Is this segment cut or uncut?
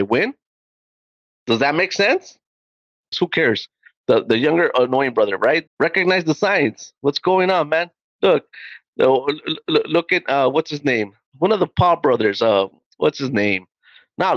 cut